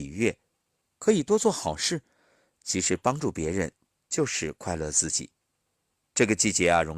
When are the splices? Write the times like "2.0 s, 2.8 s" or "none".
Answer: none